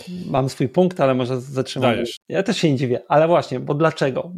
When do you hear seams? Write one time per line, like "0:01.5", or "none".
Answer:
0:02.2

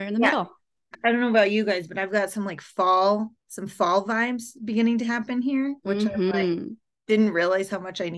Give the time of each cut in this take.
0:00.9

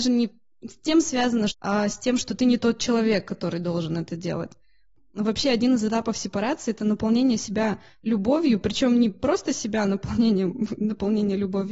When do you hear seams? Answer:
0:01.5

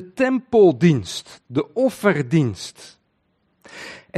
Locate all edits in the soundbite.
none

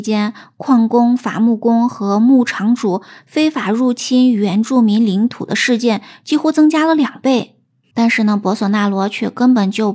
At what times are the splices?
0:07.9

